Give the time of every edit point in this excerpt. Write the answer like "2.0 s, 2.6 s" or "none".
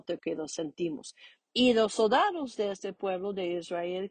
1.4 s